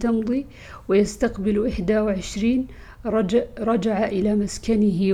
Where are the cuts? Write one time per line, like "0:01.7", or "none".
none